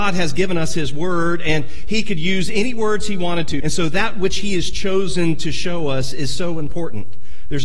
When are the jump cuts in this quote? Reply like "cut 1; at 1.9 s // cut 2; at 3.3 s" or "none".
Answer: cut 1; at 3.6 s